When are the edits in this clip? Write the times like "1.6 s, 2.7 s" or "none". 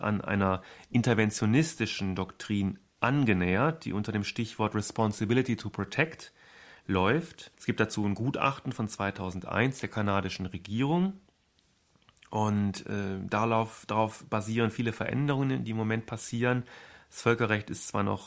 7.5 s

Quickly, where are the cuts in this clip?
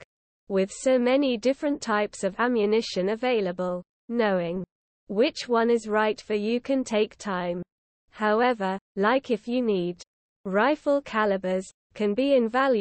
8.9 s

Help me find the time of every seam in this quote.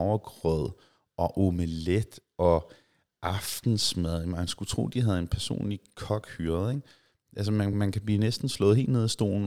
none

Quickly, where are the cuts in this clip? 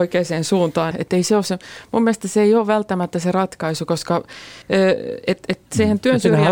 0.9 s, 4.6 s

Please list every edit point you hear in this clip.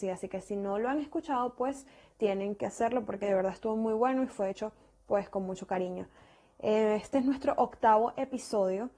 none

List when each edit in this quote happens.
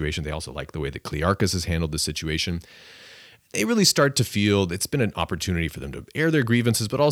none

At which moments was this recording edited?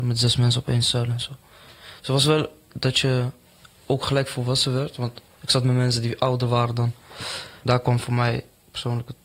7.6 s

